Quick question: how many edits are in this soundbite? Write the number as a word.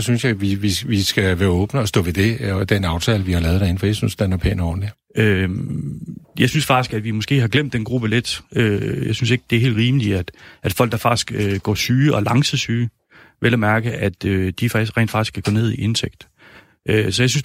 one